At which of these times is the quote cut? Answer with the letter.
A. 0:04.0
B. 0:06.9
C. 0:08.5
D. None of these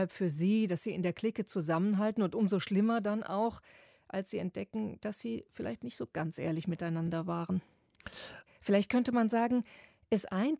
C